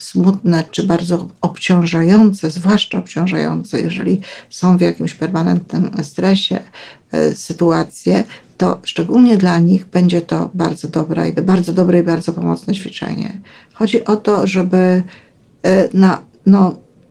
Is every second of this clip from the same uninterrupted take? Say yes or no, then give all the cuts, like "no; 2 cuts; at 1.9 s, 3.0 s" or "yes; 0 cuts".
no; 1 cut; at 11.4 s